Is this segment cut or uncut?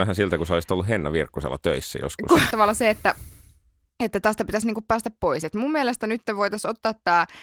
cut